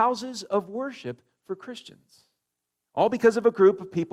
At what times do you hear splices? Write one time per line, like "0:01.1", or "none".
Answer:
0:02.9